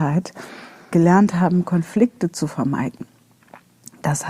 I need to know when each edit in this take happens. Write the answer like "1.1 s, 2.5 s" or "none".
0.9 s